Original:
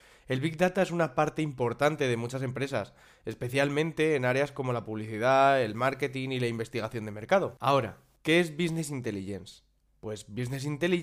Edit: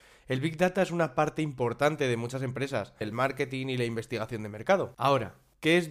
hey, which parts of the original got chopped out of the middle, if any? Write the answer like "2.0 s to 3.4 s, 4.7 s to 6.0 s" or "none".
3.0 s to 5.6 s